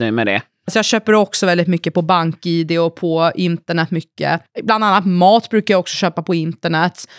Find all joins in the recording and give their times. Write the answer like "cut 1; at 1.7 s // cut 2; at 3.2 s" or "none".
none